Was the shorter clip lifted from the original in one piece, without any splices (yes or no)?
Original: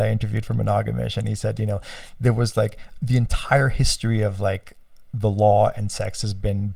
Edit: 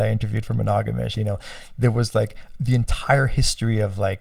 no